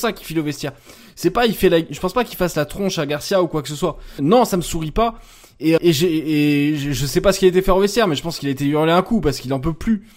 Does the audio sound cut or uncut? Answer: cut